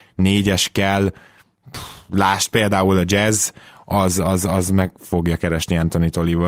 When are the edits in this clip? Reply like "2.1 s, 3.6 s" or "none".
none